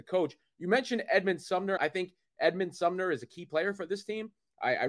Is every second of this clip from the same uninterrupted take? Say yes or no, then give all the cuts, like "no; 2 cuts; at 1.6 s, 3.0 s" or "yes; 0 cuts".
no; 1 cut; at 1.8 s